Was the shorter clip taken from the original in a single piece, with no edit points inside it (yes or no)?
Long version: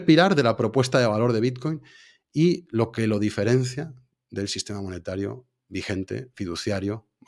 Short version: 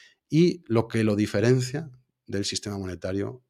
yes